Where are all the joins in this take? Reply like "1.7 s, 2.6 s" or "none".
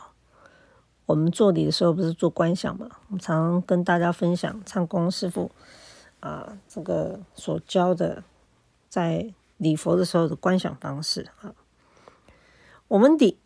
none